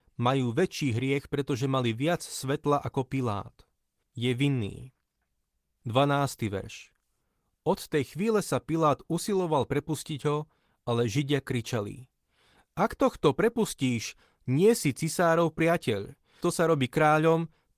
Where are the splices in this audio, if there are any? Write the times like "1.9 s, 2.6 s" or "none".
4.0 s, 16.4 s